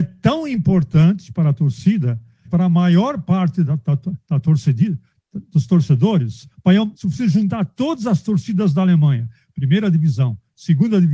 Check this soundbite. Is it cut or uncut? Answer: cut